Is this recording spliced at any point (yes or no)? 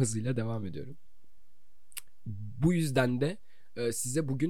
no